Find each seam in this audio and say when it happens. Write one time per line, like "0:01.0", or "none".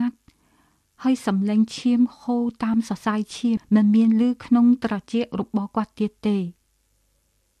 0:03.6